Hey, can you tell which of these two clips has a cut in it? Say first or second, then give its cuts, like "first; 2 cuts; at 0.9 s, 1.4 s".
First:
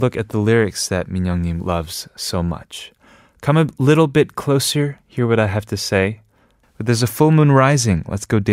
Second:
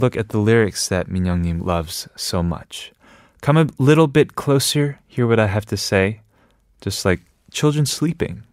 first; 1 cut; at 6.6 s